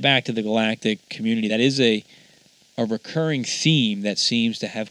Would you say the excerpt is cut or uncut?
uncut